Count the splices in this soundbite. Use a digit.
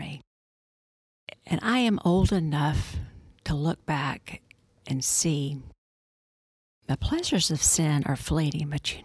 1